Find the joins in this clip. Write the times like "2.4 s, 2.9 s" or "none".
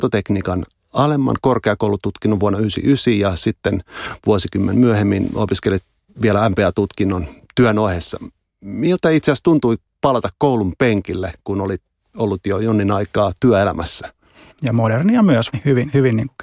14.5 s, 15.5 s